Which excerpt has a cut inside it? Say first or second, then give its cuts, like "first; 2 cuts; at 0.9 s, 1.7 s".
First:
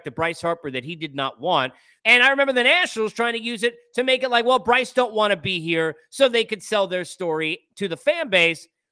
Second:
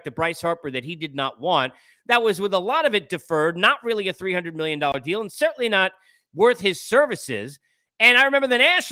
first; 1 cut; at 2.0 s